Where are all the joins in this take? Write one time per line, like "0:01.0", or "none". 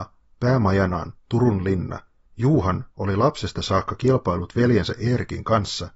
0:02.3

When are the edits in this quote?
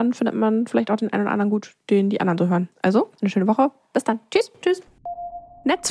0:03.2

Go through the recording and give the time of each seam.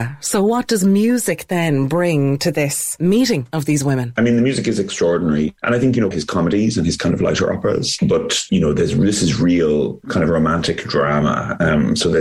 0:06.1
0:10.0

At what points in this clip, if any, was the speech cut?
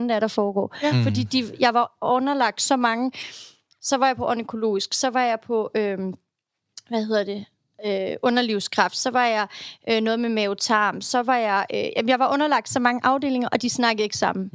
none

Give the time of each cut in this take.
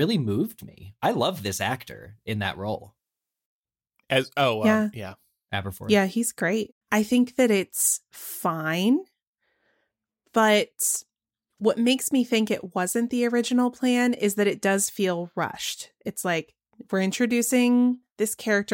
0:06.8

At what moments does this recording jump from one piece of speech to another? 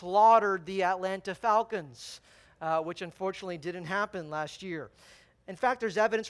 none

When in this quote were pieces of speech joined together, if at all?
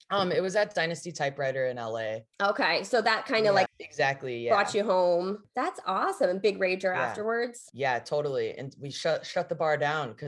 0:03.7

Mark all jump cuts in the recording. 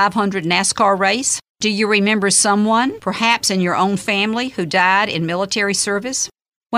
0:01.5

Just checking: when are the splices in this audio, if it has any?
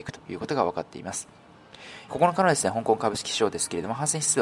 0:02.1

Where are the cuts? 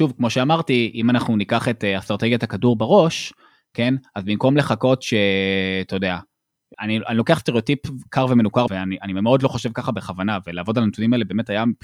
0:06.7
0:08.7

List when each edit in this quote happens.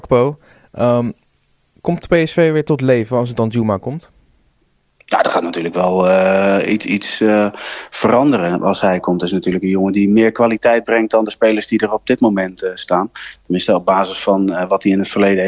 none

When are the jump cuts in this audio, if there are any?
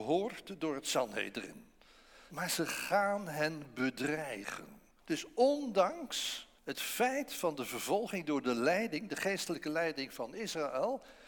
0:02.3
0:05.0
0:06.6

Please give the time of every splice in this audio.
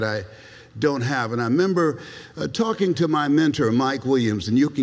none

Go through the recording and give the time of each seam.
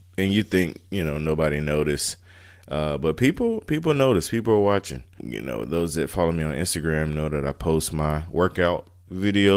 0:05.2

